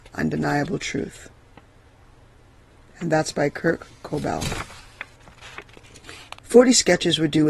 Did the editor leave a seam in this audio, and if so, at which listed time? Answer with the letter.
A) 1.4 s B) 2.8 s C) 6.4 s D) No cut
C